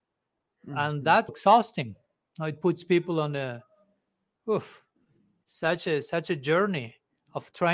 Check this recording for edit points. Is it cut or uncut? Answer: cut